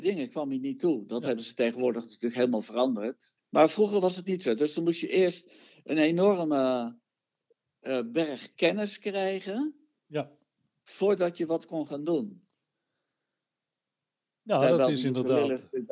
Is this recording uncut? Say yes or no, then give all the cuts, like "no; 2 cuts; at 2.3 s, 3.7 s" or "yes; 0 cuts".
no; 1 cut; at 3.4 s